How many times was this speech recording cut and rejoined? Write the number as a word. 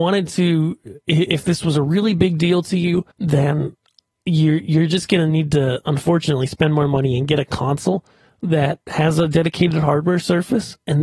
one